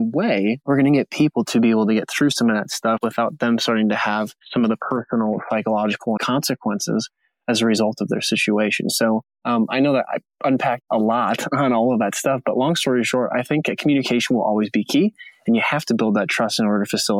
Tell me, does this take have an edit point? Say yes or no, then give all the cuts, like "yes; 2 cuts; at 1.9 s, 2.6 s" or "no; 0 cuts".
yes; 1 cut; at 6.2 s